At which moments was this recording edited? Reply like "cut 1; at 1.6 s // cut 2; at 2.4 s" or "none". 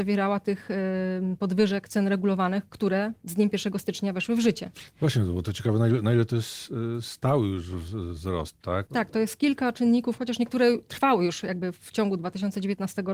cut 1; at 8.9 s // cut 2; at 10.2 s